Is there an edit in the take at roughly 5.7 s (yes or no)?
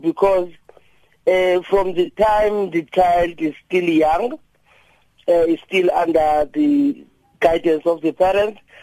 no